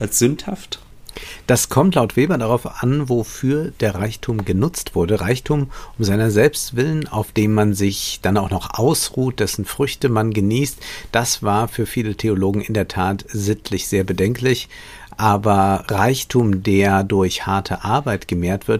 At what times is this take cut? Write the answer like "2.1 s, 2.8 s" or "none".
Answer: none